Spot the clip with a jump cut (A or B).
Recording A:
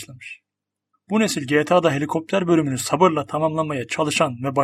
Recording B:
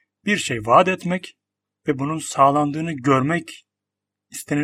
A